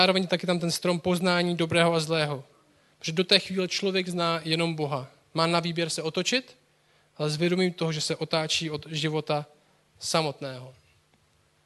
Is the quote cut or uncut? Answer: uncut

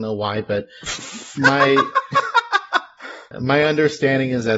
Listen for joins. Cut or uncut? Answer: cut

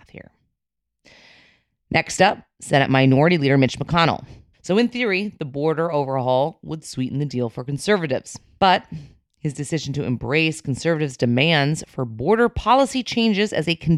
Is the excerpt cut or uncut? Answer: cut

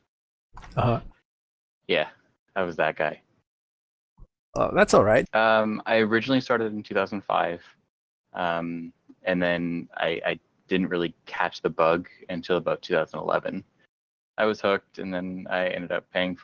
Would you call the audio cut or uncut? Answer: cut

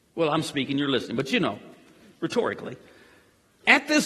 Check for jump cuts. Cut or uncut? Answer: uncut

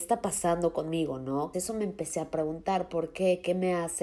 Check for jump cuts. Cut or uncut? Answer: cut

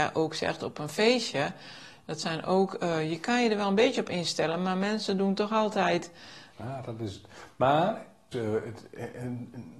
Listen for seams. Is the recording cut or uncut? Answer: cut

